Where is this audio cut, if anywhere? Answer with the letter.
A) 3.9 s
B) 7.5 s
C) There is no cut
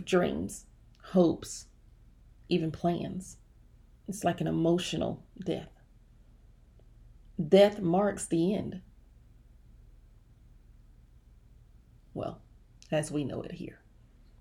A